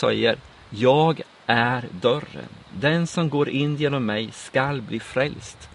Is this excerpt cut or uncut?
uncut